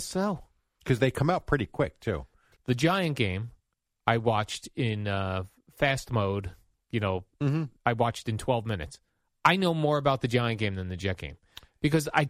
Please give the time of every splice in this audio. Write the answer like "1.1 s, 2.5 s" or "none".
2.6 s, 7.8 s